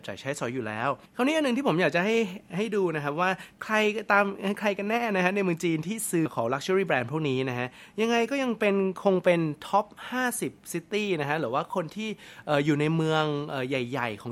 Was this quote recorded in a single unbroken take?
no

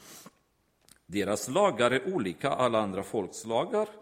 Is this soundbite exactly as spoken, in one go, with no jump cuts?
yes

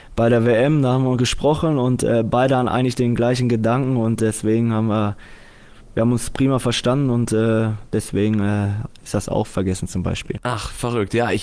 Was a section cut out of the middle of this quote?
no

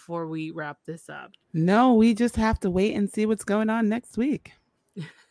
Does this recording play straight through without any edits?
no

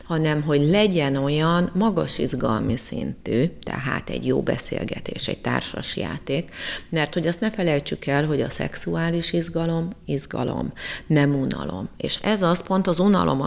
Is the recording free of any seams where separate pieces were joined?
yes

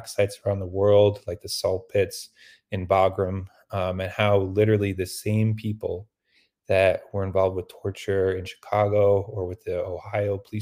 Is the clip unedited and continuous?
yes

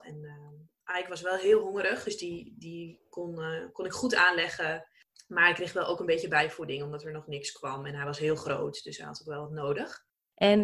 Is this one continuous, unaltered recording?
yes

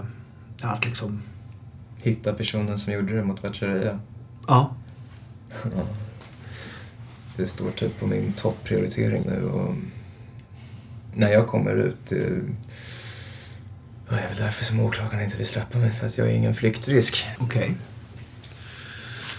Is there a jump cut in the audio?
yes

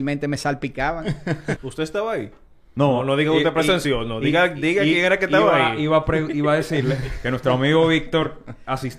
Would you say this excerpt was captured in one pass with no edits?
no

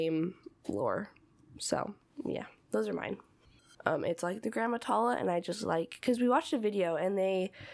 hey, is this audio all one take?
no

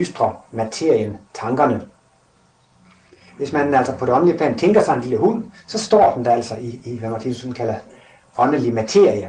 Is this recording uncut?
yes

